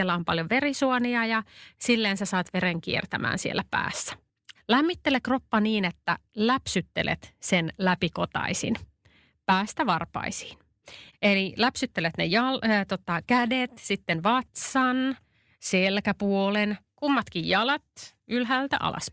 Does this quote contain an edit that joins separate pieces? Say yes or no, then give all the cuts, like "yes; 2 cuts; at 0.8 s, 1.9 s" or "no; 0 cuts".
yes; 3 cuts; at 4.6 s, 11.1 s, 16.9 s